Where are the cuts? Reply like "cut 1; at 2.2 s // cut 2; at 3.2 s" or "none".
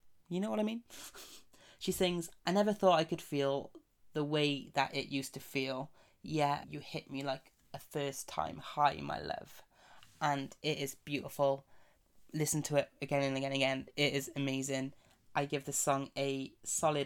cut 1; at 6.6 s